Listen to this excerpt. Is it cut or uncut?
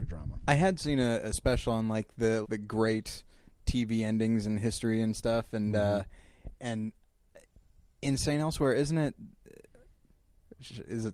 cut